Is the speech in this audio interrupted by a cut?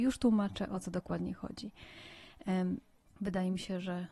yes; 1 cut; at 3.0 s

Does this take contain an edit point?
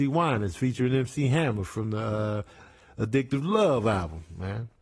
no; 0 cuts

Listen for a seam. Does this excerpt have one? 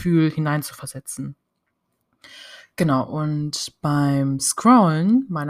no; 0 cuts

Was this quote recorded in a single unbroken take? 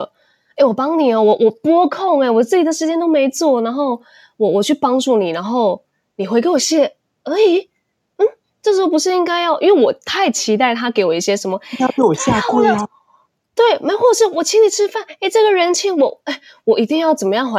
no; 1 cut; at 6.6 s

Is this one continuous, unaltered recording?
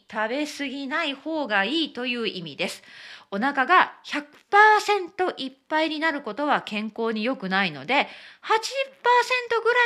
yes; 0 cuts

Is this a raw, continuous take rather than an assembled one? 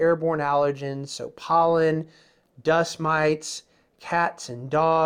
yes; 0 cuts

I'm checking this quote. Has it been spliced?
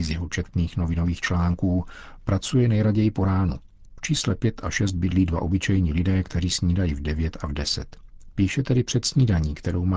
yes; 2 cuts; at 3.9 s, 8.3 s

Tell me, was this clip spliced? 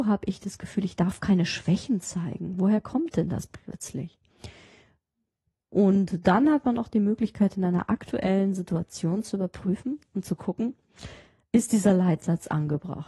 no; 0 cuts

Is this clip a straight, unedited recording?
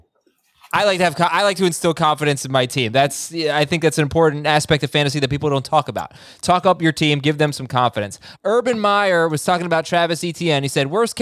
no; 1 cut; at 8.4 s

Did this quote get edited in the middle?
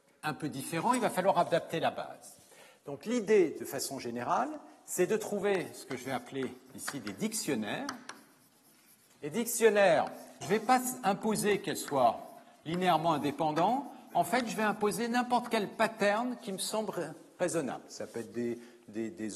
yes; 1 cut; at 10.4 s

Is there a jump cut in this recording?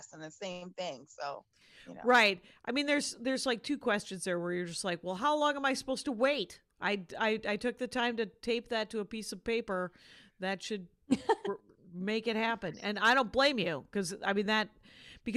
no; 0 cuts

